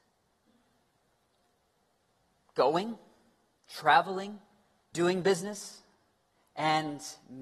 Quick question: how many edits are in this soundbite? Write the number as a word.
one